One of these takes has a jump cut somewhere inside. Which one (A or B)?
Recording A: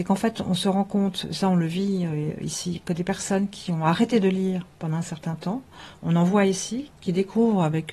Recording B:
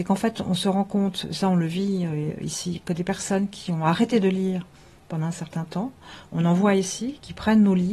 A